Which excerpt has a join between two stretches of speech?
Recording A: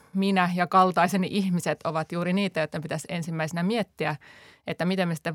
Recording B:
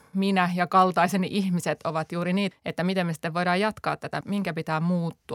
B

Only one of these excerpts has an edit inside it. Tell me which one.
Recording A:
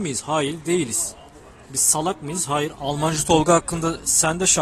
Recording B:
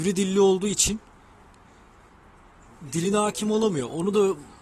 A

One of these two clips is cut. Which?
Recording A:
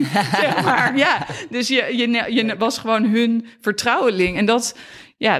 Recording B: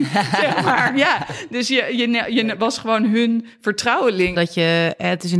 B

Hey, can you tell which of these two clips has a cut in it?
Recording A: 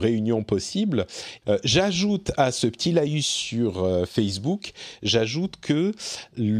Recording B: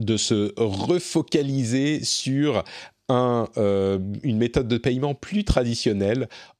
A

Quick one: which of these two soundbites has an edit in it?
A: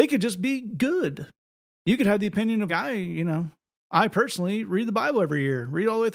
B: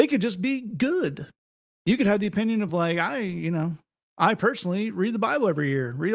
A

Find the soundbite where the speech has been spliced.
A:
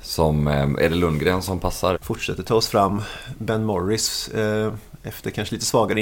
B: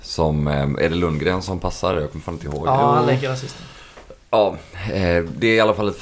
A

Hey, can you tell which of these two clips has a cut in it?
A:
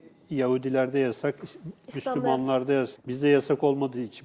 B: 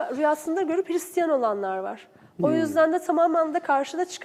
A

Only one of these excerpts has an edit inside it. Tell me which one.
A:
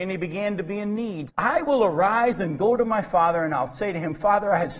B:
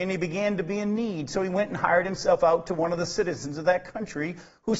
A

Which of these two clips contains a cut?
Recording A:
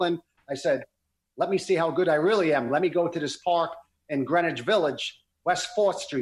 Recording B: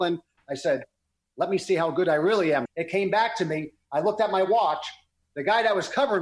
B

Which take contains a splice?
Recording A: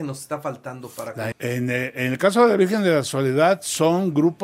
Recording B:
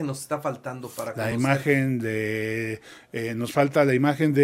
A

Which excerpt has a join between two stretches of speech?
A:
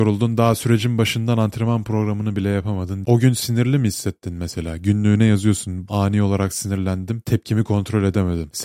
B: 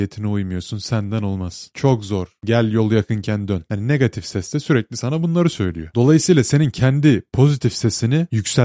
A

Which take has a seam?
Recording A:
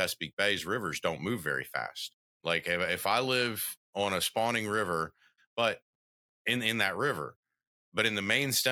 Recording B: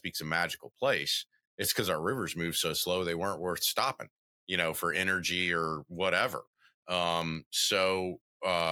A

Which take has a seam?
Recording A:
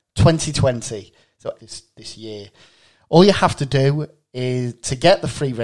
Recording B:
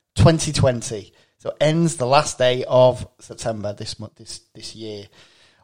A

